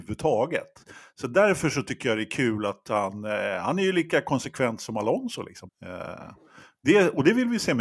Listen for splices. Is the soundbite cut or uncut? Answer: cut